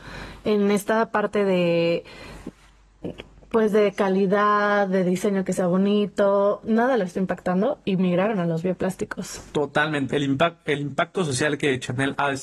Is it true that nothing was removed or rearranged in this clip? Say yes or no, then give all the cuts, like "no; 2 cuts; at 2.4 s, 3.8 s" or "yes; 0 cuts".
no; 1 cut; at 10.1 s